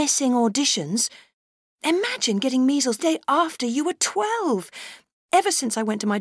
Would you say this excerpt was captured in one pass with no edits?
no; 2 cuts; at 1.8 s, 3.0 s

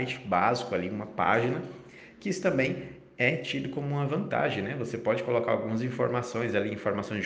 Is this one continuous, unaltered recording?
yes; 0 cuts

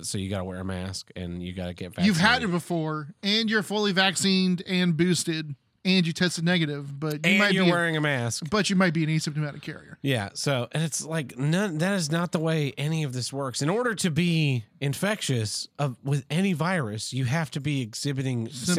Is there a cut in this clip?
no; 0 cuts

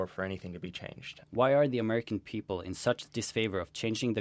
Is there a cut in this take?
yes; 1 cut; at 1.2 s

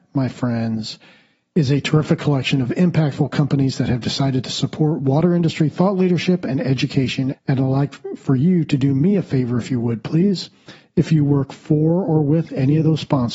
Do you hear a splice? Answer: yes; 1 cut; at 7.3 s

